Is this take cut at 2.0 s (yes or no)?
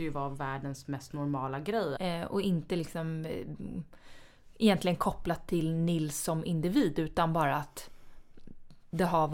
yes